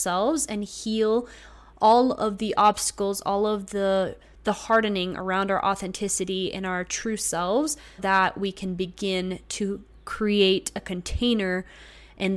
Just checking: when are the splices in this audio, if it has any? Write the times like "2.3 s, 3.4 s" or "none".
8.0 s